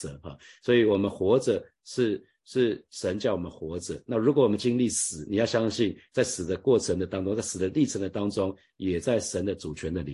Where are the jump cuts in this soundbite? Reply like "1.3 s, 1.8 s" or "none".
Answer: none

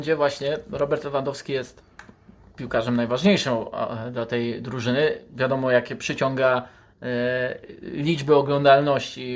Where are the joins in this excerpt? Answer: none

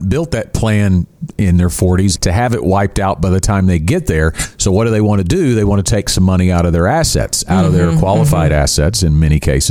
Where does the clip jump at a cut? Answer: 2.1 s

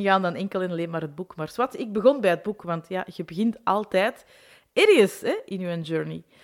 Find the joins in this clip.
none

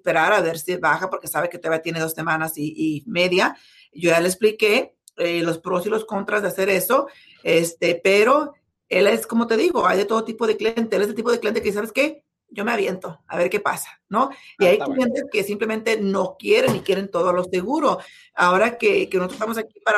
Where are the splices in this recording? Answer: none

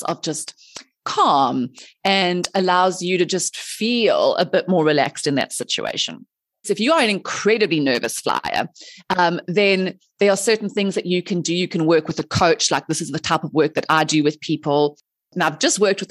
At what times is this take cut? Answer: 6.6 s

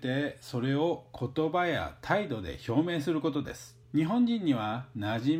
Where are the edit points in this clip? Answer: 3.8 s

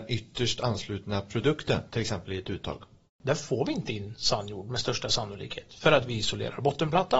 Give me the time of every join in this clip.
3.1 s

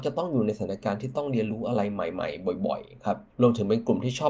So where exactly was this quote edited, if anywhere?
3.3 s

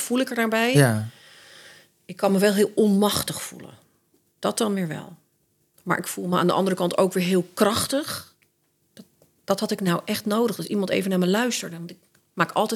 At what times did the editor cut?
8.9 s

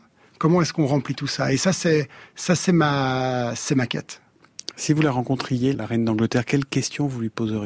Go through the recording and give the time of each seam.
5.7 s

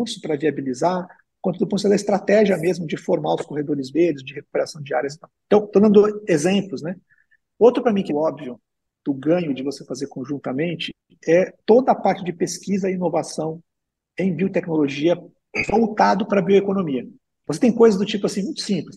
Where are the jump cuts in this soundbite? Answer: 8.1 s, 17.3 s

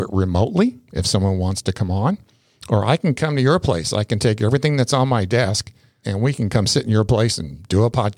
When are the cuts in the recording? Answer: 6.0 s

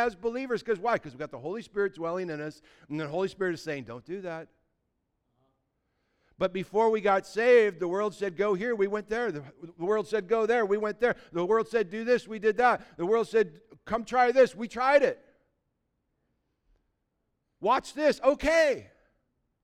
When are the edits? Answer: none

